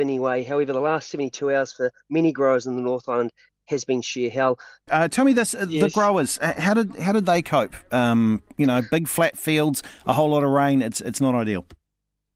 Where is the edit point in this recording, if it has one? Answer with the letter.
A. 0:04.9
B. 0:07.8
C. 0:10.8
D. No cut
A